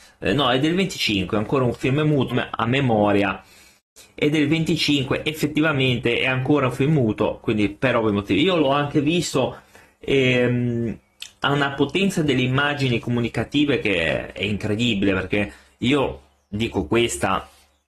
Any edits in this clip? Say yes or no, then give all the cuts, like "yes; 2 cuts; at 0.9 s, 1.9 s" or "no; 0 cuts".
yes; 1 cut; at 2.3 s